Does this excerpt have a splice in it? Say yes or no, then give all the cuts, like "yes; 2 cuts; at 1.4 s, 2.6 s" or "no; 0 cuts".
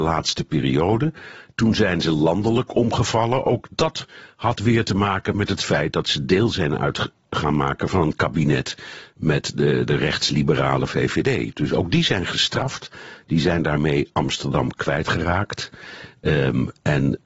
no; 0 cuts